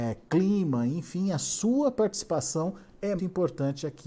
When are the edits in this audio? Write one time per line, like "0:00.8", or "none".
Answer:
0:03.2